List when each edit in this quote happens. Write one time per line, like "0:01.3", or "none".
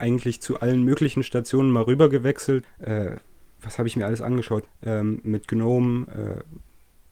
0:02.6
0:04.7